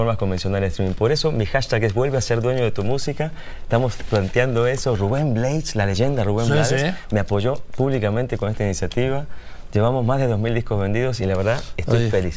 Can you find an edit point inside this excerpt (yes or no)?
no